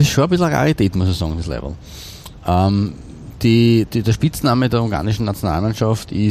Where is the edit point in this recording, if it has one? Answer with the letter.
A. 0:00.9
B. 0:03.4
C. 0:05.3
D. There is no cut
D